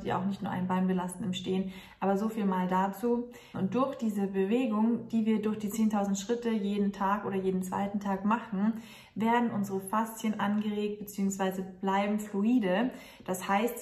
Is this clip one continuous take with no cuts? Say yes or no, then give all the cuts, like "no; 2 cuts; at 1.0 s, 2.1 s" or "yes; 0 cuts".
no; 1 cut; at 3.5 s